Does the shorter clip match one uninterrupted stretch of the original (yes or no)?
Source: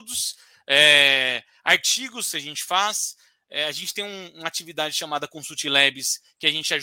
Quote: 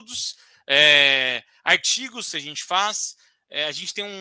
yes